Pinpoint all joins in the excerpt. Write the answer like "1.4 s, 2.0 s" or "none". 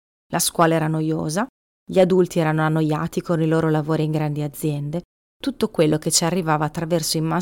none